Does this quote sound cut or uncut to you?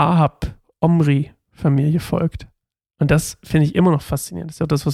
uncut